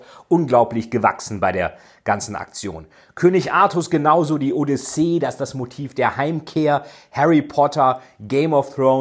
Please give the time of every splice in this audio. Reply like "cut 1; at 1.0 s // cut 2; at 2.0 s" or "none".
none